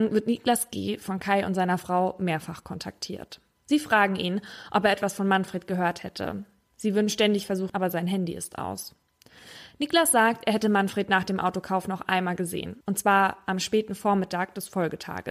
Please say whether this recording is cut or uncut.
cut